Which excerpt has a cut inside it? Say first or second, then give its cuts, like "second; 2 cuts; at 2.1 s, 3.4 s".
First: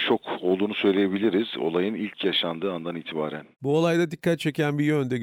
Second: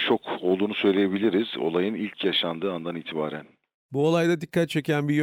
first; 1 cut; at 3.5 s